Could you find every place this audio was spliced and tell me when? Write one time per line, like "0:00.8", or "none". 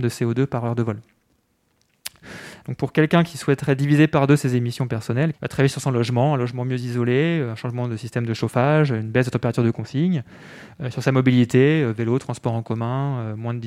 0:02.6
0:05.3